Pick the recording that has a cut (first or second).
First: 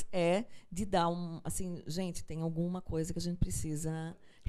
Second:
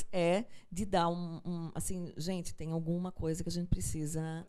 first